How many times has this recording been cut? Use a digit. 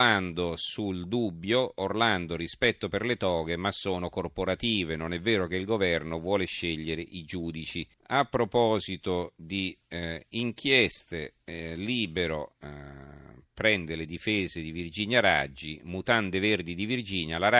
1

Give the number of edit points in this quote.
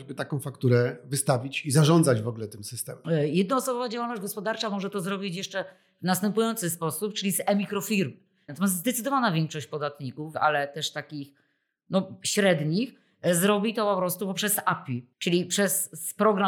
3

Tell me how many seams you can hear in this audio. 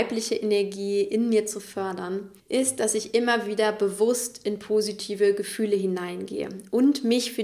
1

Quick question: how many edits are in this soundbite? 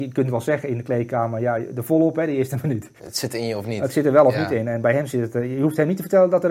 1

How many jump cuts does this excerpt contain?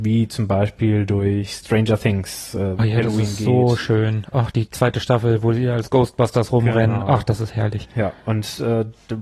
1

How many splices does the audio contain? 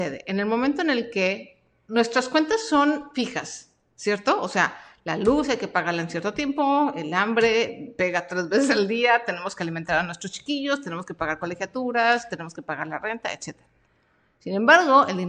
0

